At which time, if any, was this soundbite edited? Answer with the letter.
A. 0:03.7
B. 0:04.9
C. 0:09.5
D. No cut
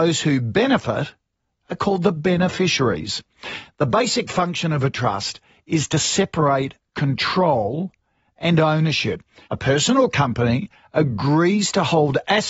C